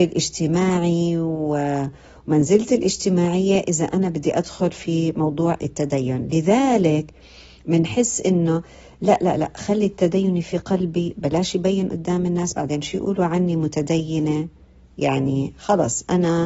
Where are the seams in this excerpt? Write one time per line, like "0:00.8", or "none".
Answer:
none

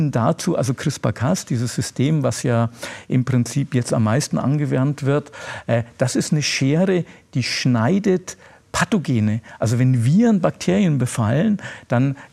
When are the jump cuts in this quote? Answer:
none

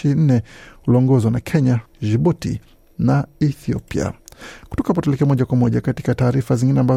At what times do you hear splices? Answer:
0:01.9

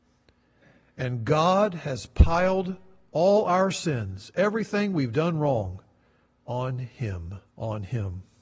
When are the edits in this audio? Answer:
0:07.5

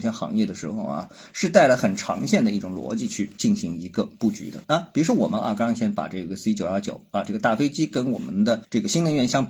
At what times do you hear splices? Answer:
0:04.6

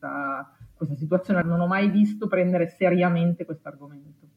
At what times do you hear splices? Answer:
0:01.4

